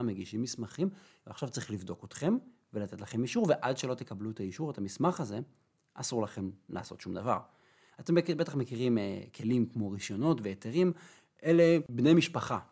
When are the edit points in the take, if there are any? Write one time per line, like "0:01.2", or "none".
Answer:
none